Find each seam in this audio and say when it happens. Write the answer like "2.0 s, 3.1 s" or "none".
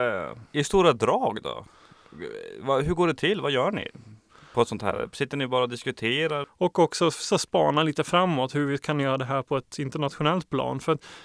6.4 s